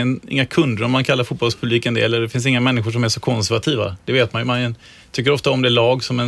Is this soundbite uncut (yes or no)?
yes